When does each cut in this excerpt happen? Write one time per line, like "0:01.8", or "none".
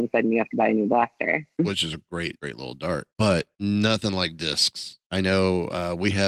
0:01.6